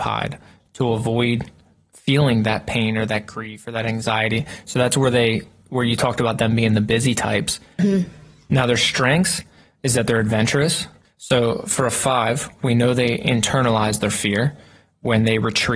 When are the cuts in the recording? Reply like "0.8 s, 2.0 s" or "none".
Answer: 7.8 s, 11.0 s